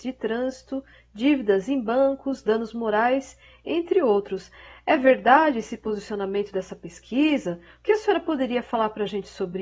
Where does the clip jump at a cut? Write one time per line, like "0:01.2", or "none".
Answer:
none